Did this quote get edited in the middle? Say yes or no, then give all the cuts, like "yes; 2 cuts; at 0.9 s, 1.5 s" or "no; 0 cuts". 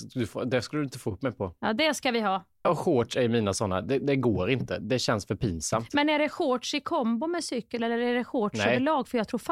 yes; 1 cut; at 2.6 s